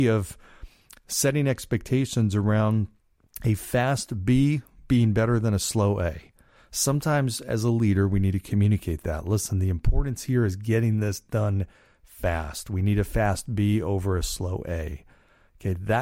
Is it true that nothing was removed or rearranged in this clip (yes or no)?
yes